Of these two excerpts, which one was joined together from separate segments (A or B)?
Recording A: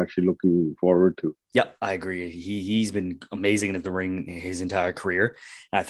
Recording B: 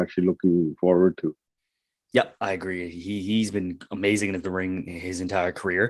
A